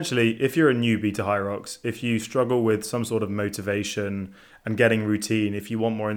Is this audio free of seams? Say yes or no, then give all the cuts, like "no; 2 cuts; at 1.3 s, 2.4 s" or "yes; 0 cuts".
yes; 0 cuts